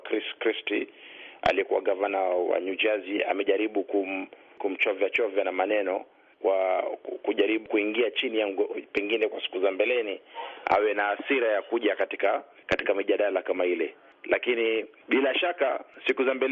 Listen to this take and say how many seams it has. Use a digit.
1